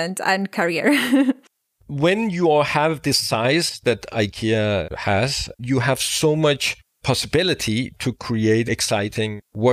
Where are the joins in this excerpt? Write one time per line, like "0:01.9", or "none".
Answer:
0:05.6
0:08.7